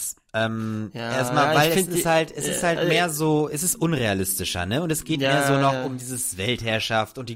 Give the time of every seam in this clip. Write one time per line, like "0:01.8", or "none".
none